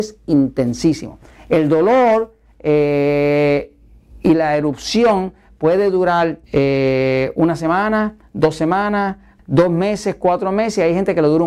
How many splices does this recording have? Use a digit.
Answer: 2